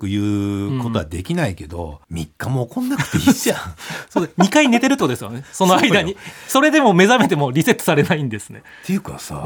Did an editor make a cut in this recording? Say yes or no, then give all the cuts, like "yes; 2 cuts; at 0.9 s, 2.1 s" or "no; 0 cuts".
yes; 1 cut; at 2.0 s